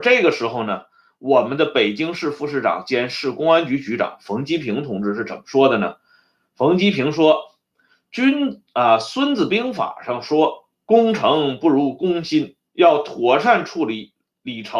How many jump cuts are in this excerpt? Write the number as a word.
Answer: one